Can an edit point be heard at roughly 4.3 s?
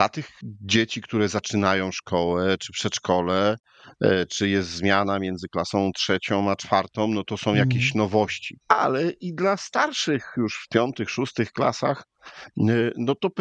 no; 1 cut; at 8.6 s

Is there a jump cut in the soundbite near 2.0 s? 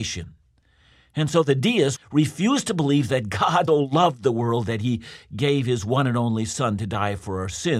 yes; 2 cuts; at 2.0 s, 3.7 s

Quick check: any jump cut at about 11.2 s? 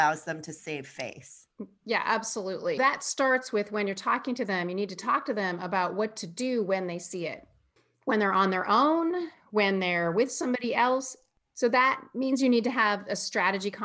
no; 1 cut; at 2.8 s

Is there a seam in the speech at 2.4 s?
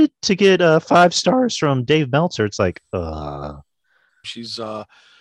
no; 1 cut; at 4.2 s

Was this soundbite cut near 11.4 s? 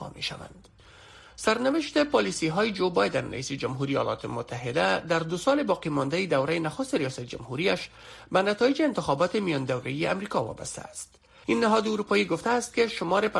yes; 2 cuts; at 1.2 s, 11.4 s

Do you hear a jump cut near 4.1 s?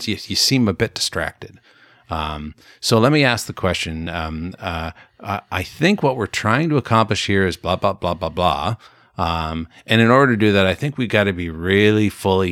no; 0 cuts

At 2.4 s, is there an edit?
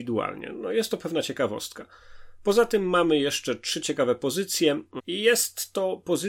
no; 1 cut; at 5.0 s

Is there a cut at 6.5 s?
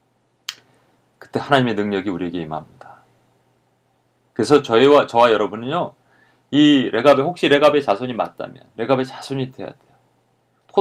no; 0 cuts

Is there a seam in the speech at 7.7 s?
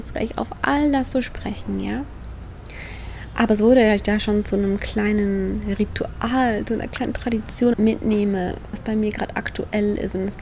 yes; 2 cuts; at 7.7 s, 8.7 s

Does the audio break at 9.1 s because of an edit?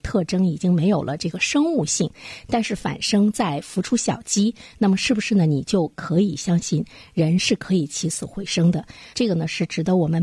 yes; 1 cut; at 9.1 s

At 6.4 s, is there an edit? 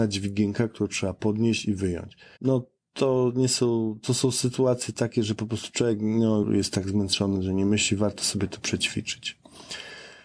yes; 2 cuts; at 2.4 s, 6.4 s

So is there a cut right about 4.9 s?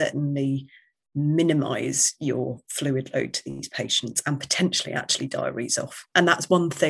no; 0 cuts

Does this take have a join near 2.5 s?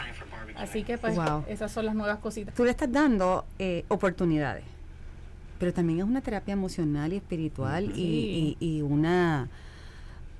yes; 1 cut; at 2.5 s

